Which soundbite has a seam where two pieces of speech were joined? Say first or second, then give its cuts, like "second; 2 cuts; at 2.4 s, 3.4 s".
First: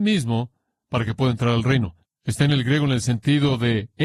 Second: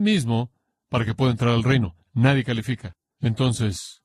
first; 1 cut; at 2.1 s